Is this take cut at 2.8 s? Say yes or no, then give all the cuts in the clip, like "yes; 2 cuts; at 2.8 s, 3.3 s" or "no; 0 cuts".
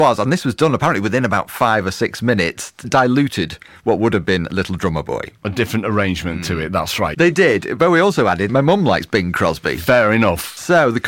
yes; 3 cuts; at 2.8 s, 7.1 s, 8.5 s